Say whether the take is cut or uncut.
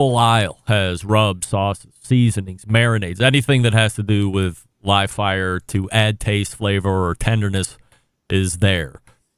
uncut